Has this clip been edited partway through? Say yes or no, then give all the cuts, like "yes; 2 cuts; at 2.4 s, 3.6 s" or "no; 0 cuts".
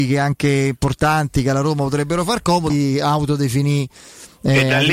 yes; 1 cut; at 2.7 s